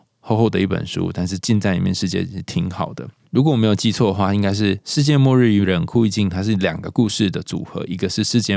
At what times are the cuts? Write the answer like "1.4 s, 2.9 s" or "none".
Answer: 3.2 s